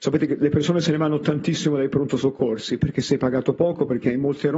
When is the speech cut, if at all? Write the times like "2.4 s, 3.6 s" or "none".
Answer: 2.8 s